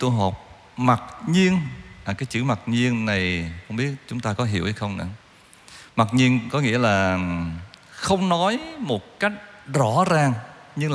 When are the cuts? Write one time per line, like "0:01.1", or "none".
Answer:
none